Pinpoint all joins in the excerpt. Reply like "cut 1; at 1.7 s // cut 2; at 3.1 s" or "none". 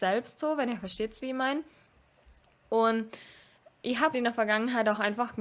cut 1; at 4.1 s